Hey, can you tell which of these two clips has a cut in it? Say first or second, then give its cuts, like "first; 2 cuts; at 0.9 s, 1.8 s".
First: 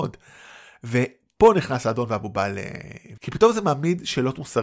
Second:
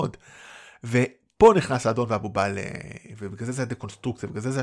first; 1 cut; at 3.2 s